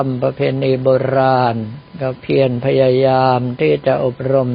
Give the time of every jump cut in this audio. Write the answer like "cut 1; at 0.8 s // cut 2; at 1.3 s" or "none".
cut 1; at 1.9 s